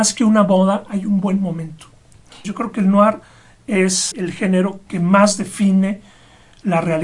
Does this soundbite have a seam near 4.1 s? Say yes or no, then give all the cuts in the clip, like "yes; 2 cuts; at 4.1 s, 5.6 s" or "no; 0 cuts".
yes; 2 cuts; at 2.4 s, 4.1 s